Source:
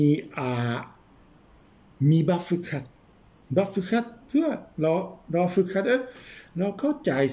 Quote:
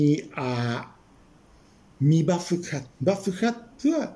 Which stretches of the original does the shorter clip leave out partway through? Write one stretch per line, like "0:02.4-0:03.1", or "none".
0:02.9-0:03.4